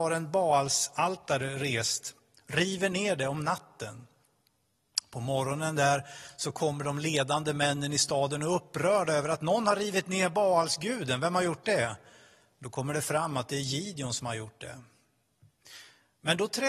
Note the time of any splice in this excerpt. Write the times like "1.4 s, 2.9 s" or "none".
none

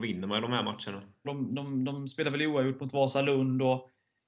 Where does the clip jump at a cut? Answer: 1.2 s

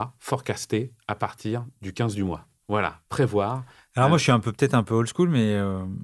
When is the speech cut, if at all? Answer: 2.6 s, 3.9 s

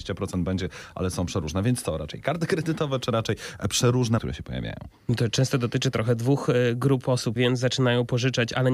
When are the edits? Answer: 4.2 s, 7.4 s

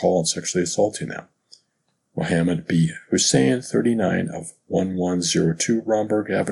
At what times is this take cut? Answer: none

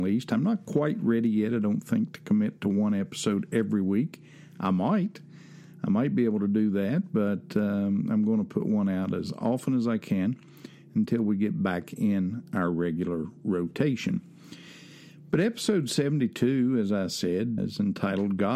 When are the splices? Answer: 17.6 s

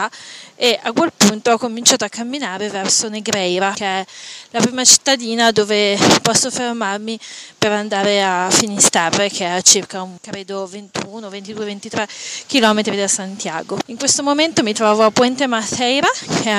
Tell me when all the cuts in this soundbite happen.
13.8 s

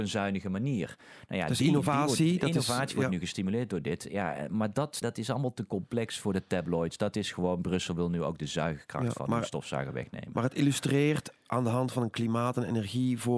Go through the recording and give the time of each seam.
5.0 s

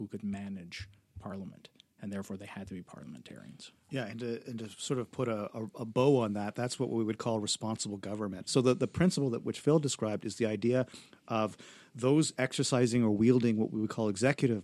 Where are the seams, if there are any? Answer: 8.5 s

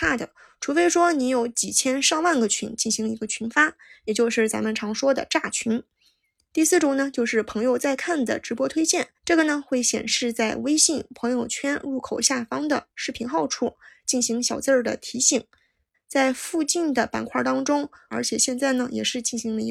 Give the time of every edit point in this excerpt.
9.2 s, 15.9 s, 18.1 s

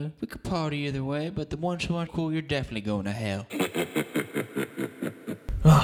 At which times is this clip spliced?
2.1 s

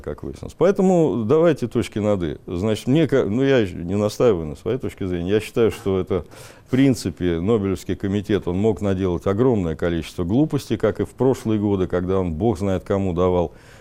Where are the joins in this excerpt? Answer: none

